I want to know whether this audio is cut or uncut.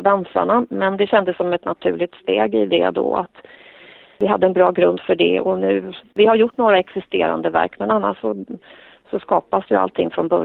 cut